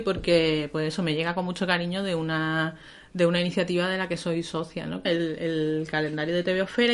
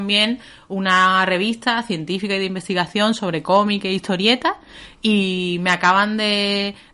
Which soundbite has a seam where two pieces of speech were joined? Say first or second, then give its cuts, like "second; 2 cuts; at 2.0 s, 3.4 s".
first; 1 cut; at 5.0 s